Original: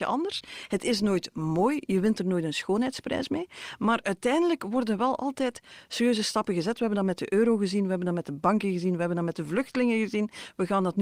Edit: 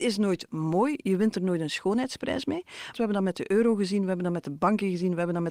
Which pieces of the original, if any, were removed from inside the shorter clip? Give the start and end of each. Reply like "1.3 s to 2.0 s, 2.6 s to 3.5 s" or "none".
3.8 s to 6.8 s